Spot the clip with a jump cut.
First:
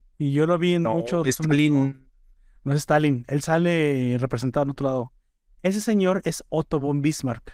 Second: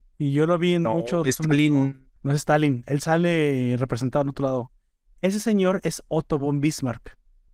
second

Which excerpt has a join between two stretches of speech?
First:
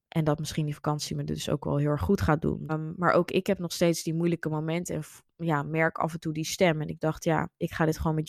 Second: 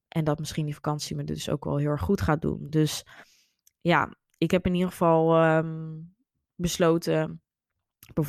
first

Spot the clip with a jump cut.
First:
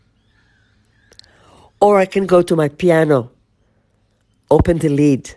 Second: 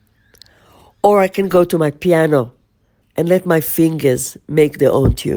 second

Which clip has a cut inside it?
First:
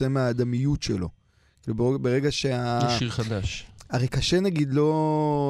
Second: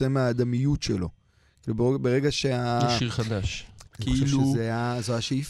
second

